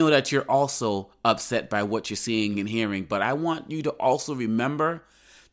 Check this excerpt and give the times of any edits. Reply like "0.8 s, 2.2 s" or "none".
2.5 s